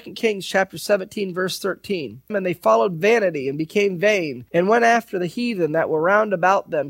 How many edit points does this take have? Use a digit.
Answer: 1